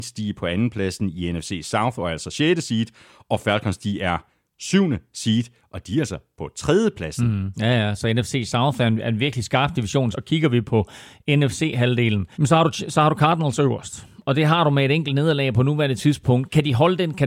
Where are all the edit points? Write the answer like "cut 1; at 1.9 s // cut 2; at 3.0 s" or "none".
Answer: cut 1; at 7.5 s // cut 2; at 10.1 s // cut 3; at 12.3 s